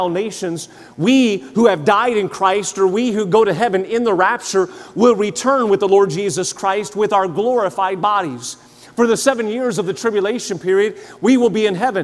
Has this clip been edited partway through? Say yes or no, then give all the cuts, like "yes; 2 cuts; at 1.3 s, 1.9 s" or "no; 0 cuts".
no; 0 cuts